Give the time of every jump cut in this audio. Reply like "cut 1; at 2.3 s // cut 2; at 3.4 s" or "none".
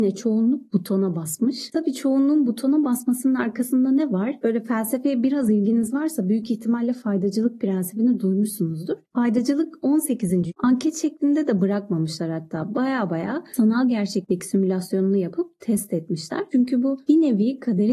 cut 1; at 10.5 s // cut 2; at 16.5 s